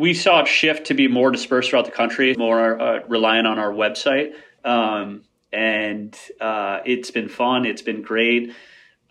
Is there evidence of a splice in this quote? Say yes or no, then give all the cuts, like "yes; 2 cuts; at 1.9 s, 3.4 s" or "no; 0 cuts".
yes; 2 cuts; at 2.3 s, 4.6 s